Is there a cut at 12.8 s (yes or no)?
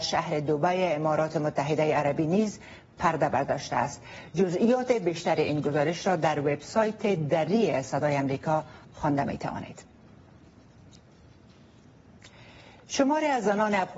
no